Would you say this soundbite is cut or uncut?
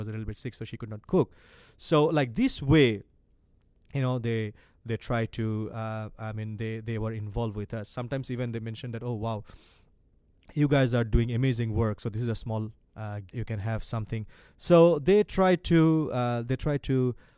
cut